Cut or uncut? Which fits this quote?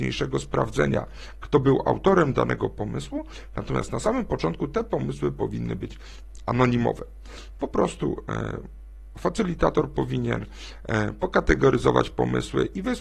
cut